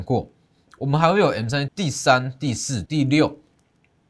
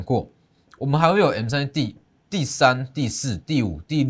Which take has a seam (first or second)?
first